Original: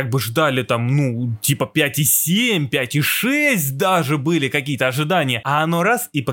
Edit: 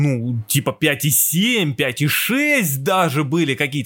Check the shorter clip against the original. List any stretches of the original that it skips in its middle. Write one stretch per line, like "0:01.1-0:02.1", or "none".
none